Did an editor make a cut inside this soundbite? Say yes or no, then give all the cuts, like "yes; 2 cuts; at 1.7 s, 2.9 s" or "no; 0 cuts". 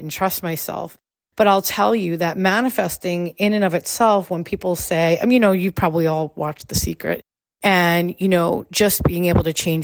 no; 0 cuts